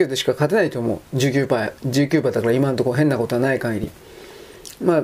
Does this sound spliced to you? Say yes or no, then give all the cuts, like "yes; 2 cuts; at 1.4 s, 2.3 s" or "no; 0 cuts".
no; 0 cuts